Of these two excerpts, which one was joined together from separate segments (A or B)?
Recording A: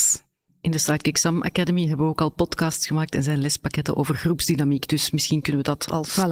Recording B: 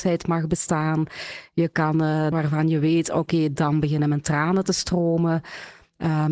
B